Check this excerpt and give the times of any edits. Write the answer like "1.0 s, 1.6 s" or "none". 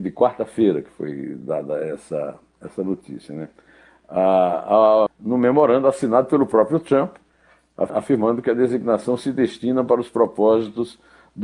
5.1 s, 7.9 s